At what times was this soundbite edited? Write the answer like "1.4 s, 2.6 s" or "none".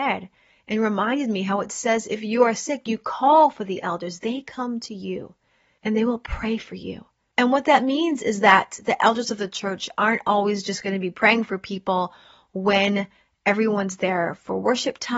none